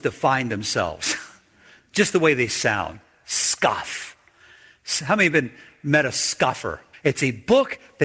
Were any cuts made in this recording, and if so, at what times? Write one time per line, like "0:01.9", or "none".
0:06.9